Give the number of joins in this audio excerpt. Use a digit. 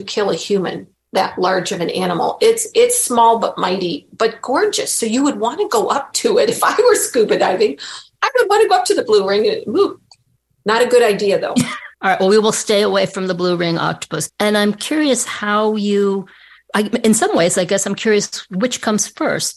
2